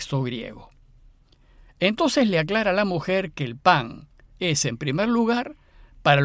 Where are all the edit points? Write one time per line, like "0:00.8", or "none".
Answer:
0:04.4